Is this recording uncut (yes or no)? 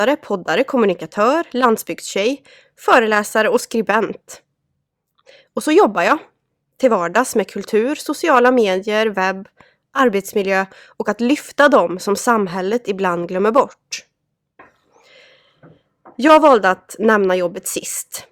yes